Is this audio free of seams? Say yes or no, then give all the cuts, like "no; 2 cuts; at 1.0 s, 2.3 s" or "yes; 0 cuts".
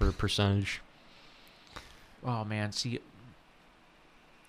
yes; 0 cuts